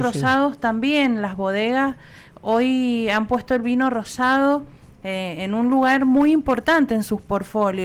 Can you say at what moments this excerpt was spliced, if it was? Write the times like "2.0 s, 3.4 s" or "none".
none